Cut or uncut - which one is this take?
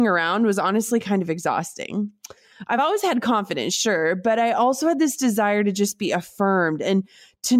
uncut